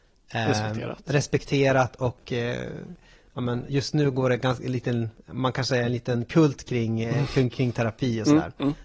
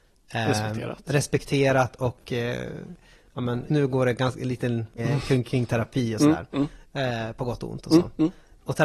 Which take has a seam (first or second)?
second